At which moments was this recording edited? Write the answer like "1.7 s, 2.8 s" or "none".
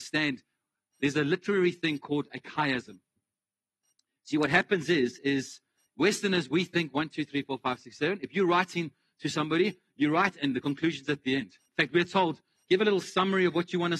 none